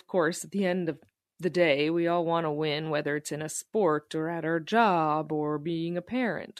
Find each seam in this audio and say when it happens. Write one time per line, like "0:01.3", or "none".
none